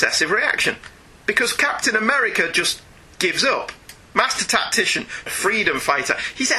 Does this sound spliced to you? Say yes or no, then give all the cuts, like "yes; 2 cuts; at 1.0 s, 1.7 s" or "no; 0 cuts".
yes; 2 cuts; at 4.1 s, 5.3 s